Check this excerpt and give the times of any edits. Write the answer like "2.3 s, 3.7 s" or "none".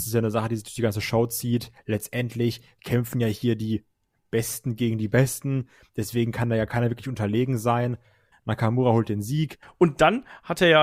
8.3 s, 9.6 s